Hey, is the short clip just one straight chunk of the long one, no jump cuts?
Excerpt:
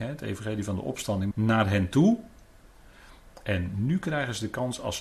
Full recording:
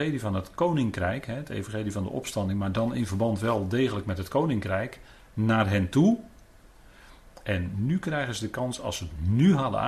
no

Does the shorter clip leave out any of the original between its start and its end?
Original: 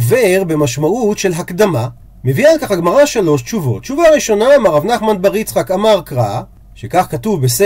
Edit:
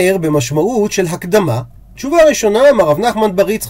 yes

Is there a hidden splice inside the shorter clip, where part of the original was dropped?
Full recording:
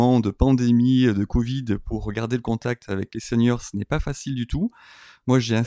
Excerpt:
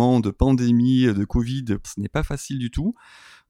yes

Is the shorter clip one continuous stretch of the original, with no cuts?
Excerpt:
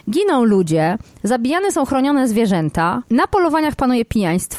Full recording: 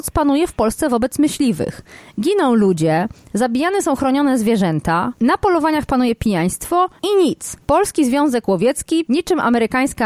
yes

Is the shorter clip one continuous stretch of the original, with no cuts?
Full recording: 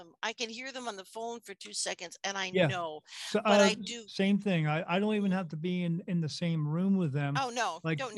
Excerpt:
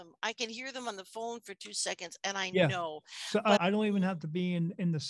no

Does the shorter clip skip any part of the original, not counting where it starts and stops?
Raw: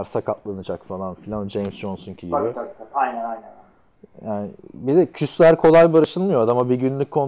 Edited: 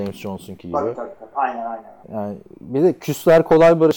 yes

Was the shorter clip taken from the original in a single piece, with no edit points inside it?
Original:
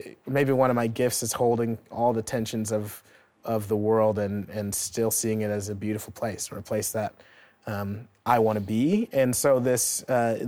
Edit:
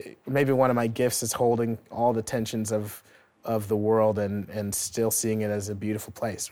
yes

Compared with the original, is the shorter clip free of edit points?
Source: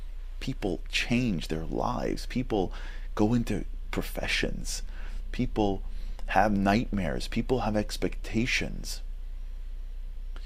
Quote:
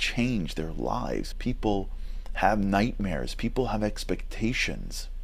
no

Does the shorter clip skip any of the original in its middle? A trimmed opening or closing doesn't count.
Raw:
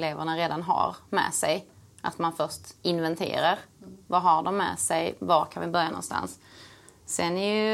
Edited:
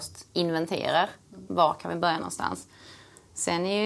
yes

